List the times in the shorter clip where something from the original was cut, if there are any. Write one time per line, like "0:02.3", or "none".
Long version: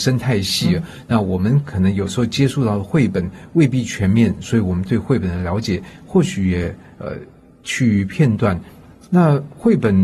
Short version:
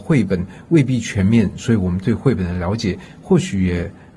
none